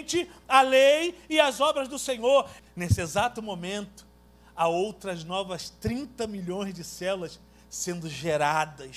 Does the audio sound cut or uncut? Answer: cut